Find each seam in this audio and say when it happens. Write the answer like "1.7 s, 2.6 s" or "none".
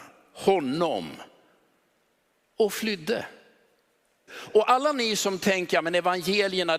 4.3 s